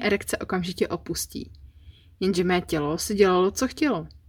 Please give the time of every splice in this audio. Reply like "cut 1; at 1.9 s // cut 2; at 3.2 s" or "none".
none